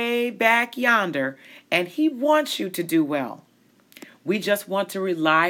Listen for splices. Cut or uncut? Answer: uncut